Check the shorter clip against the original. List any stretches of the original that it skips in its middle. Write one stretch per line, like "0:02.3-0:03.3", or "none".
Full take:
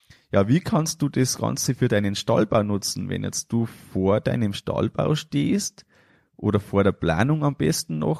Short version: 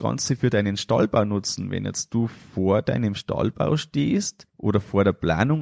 0:05.9-0:06.3